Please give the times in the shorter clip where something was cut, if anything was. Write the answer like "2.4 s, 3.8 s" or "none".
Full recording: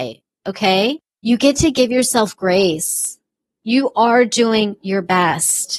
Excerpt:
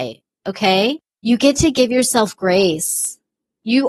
none